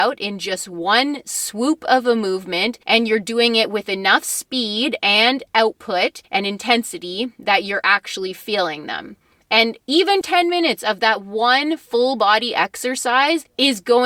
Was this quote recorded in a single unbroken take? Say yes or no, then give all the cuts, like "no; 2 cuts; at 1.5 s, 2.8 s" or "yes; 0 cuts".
no; 1 cut; at 10.2 s